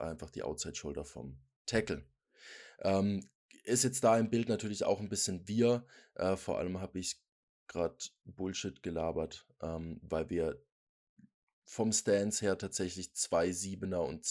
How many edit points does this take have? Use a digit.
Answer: 0